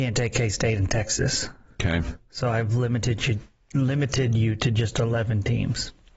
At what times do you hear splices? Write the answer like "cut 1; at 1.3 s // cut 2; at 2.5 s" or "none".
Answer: none